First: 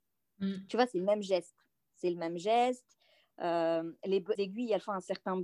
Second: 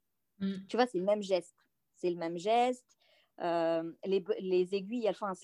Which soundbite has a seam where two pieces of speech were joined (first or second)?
first